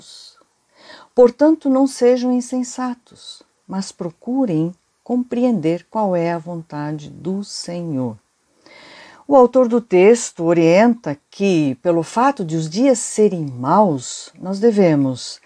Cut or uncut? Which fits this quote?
uncut